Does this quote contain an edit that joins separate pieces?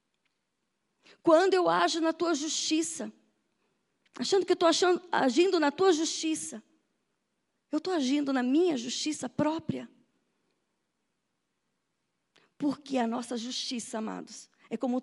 no; 0 cuts

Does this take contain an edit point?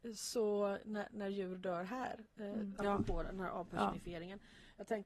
yes; 1 cut; at 2.8 s

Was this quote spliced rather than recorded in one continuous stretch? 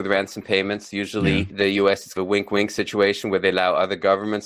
no; 0 cuts

